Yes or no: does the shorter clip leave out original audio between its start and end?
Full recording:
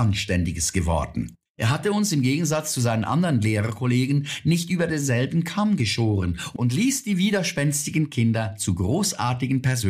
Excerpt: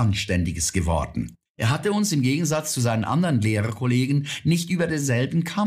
no